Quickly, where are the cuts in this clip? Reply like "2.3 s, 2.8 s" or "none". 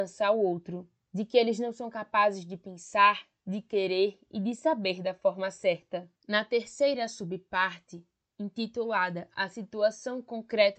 6.2 s